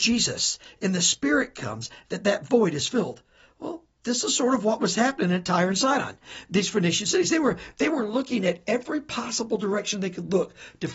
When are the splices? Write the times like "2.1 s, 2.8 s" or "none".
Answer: none